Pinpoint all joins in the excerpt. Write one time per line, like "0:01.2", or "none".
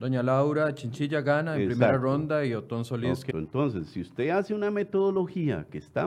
0:03.3